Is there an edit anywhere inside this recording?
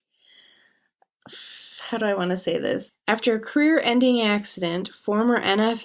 yes; 1 cut; at 2.9 s

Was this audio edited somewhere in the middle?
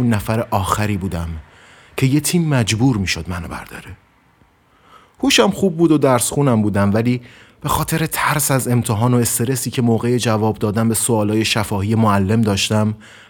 no; 0 cuts

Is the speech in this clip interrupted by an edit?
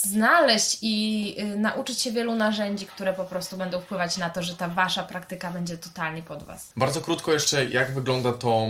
yes; 1 cut; at 6.7 s

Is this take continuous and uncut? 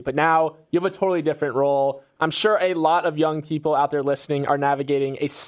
yes; 0 cuts

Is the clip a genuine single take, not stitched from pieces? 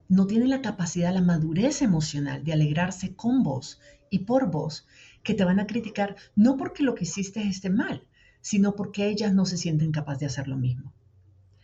yes; 0 cuts

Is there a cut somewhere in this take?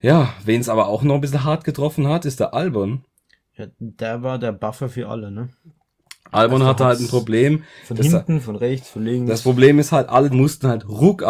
yes; 2 cuts; at 8.4 s, 10.3 s

